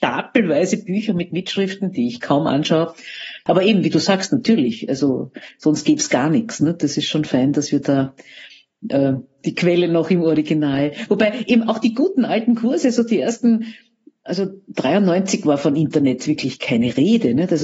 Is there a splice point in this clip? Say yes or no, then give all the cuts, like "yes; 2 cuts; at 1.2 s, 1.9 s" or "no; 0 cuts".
yes; 1 cut; at 3.5 s